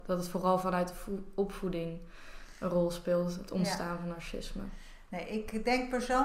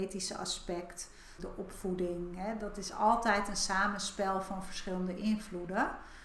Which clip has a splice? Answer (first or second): second